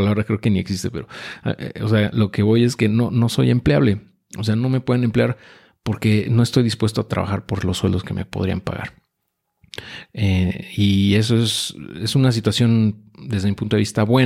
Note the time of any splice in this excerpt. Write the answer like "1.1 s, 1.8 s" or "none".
none